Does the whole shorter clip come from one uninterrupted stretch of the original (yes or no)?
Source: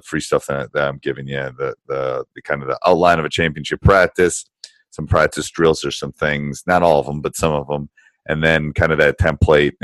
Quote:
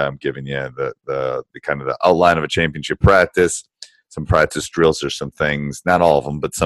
yes